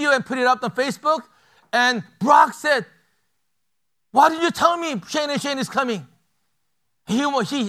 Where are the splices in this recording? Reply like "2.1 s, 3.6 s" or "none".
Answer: none